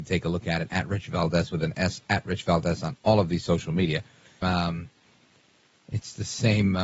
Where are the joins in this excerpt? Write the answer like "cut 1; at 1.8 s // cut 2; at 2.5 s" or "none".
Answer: cut 1; at 4.4 s